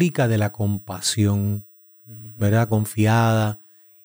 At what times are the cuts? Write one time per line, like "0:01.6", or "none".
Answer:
0:02.7